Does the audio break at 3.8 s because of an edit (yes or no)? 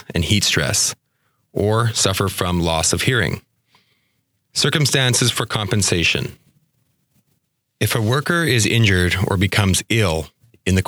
no